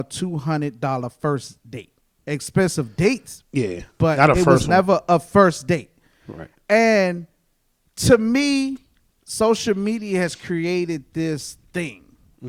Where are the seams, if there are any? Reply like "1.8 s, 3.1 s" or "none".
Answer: 2.2 s